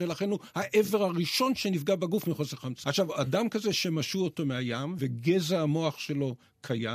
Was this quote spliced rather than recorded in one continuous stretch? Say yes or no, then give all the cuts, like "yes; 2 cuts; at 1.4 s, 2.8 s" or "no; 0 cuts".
yes; 2 cuts; at 2.8 s, 5.0 s